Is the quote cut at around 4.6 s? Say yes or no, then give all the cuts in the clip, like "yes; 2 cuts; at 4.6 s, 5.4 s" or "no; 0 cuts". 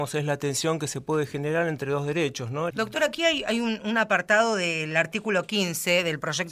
no; 1 cut; at 2.7 s